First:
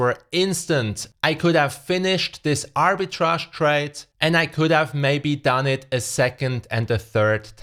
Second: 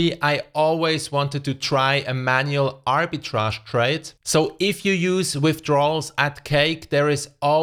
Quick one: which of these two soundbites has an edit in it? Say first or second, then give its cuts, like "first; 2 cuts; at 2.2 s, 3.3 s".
second; 1 cut; at 4.2 s